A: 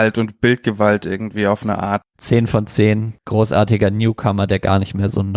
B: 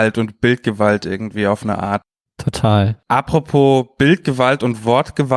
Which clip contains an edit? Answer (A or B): A